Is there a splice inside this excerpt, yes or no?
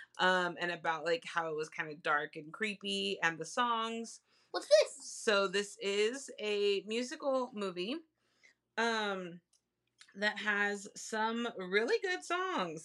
yes